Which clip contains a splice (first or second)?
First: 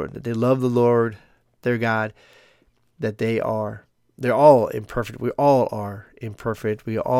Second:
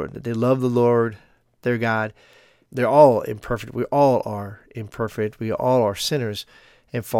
second